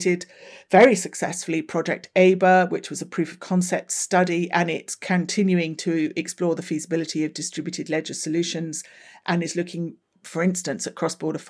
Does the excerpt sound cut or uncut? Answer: uncut